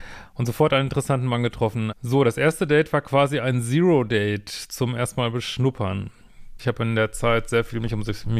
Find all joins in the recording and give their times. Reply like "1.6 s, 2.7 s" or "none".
1.9 s, 6.6 s